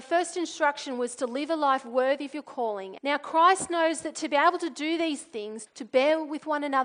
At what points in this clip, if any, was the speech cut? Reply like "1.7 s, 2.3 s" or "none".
3.0 s, 5.7 s